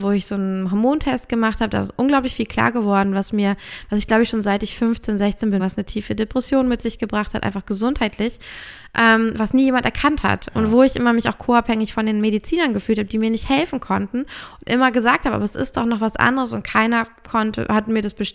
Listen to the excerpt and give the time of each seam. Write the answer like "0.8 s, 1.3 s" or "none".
5.6 s